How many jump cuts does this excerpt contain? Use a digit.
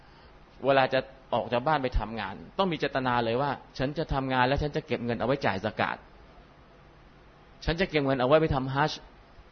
1